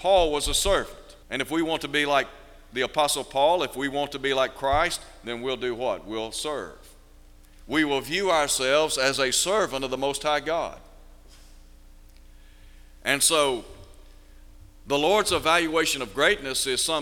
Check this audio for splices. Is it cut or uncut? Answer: cut